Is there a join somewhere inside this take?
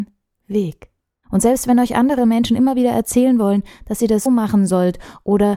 yes; 2 cuts; at 1.2 s, 4.3 s

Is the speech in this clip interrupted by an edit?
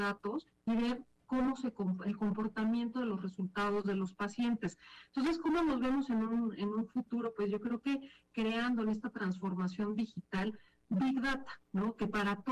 no; 0 cuts

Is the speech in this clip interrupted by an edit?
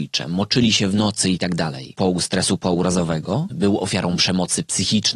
yes; 2 cuts; at 1.9 s, 3.5 s

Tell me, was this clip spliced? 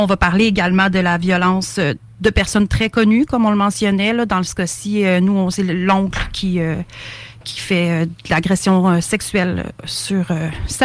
no; 0 cuts

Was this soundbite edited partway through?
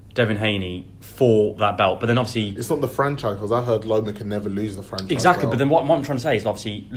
no; 0 cuts

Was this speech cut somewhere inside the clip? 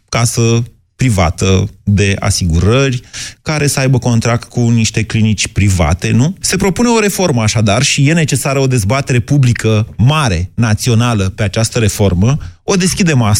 yes; 1 cut; at 6.4 s

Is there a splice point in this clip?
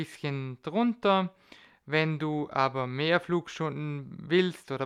no; 0 cuts

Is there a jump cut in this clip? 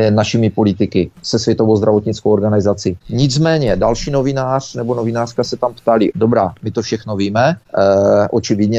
yes; 2 cuts; at 3.0 s, 6.1 s

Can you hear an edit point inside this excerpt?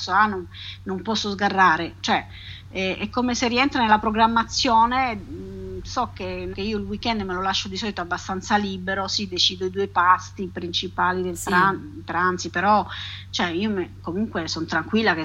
yes; 1 cut; at 6.5 s

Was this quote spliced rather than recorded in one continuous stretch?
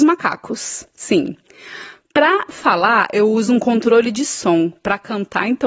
no; 0 cuts

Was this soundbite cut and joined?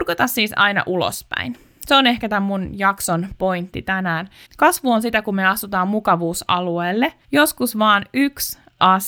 yes; 2 cuts; at 4.4 s, 7.2 s

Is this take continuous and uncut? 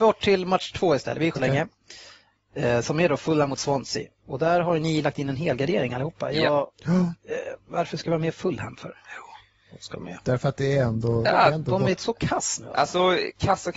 no; 1 cut; at 1.4 s

